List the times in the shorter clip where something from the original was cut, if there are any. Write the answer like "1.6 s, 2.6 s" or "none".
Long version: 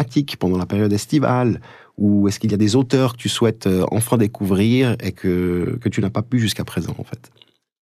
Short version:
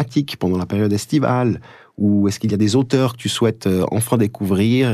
none